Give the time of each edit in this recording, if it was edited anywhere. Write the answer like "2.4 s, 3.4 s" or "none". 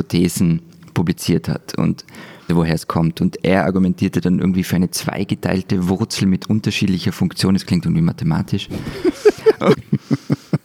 2.5 s, 9.7 s